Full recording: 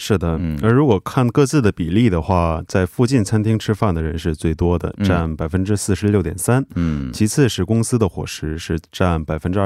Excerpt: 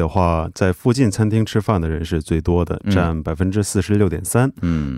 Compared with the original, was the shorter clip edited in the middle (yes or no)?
no